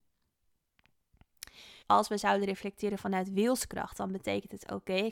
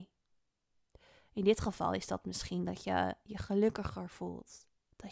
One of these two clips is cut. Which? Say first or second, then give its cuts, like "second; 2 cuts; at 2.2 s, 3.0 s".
first; 1 cut; at 1.8 s